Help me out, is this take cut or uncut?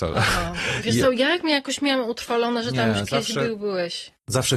uncut